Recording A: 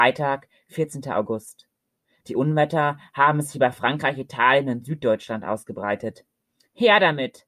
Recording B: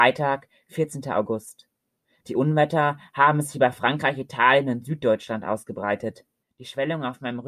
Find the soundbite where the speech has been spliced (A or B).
B